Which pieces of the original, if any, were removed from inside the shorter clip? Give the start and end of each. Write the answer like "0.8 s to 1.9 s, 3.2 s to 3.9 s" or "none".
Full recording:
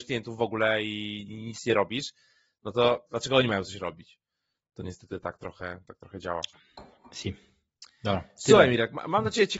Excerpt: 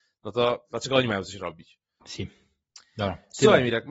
4.4 s to 7.1 s